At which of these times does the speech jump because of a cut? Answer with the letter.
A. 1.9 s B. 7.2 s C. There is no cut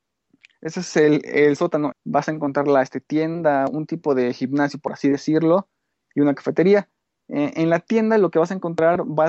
A